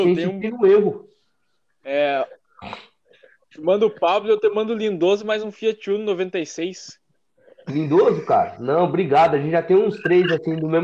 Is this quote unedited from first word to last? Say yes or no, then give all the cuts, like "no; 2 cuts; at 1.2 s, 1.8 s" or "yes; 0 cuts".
no; 1 cut; at 1.8 s